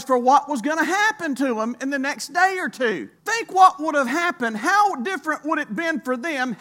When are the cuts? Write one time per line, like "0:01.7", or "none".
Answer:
0:03.2